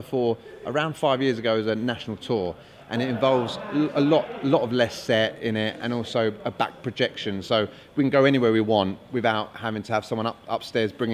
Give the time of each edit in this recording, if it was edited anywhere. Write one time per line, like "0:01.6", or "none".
none